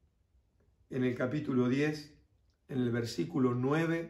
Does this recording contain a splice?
no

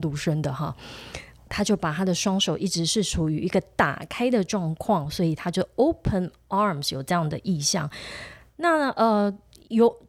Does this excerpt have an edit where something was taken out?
yes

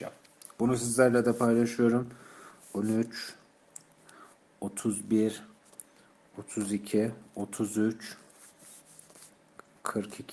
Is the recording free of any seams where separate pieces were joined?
yes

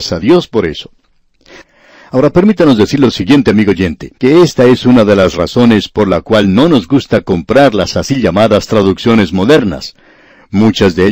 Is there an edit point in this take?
yes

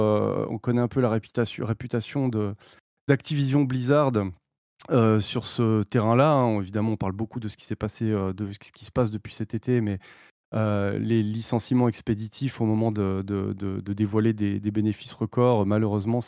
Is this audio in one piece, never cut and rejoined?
yes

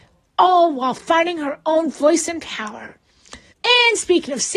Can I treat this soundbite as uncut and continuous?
no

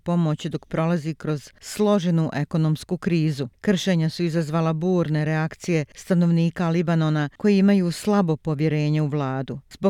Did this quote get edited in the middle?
no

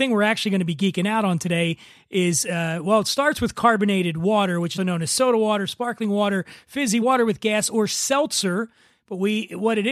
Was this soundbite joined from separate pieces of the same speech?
yes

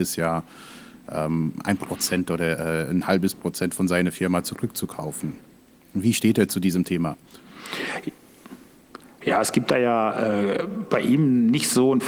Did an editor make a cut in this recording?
no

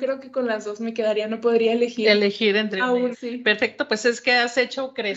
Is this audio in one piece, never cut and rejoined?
no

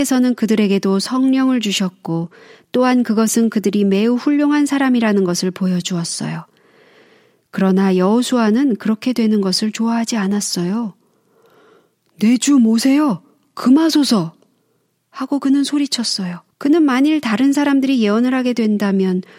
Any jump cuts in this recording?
yes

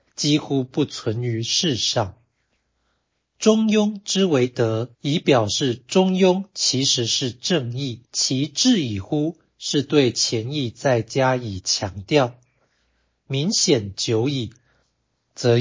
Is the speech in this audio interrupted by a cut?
yes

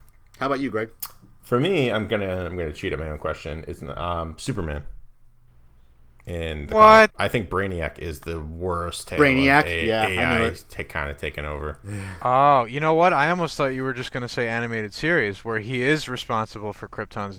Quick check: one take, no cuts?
no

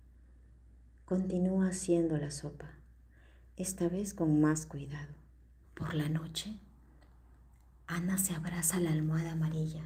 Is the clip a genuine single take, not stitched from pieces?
no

